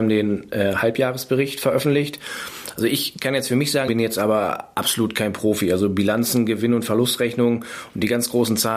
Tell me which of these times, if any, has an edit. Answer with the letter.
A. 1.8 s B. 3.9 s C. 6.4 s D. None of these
B